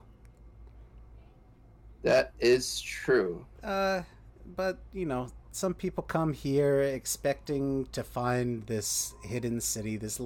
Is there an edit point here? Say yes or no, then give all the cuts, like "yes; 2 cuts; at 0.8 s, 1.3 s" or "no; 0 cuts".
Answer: yes; 2 cuts; at 3.6 s, 5.4 s